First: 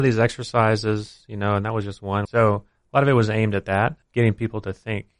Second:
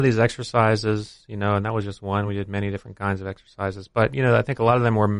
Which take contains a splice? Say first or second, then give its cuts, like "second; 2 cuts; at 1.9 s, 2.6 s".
first; 1 cut; at 2.3 s